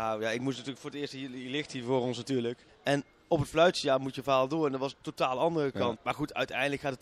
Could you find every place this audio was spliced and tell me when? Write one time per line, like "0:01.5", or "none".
0:02.7
0:06.0

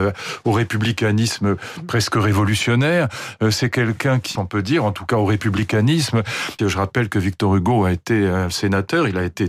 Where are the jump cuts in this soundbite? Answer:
0:04.4
0:06.6

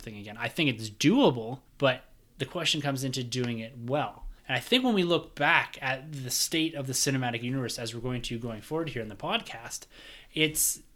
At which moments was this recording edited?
0:01.7
0:04.4

